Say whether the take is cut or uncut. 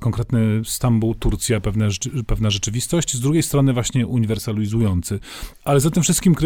cut